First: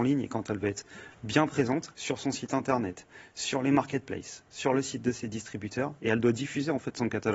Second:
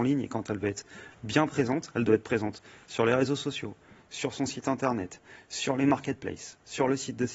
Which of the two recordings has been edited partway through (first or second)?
first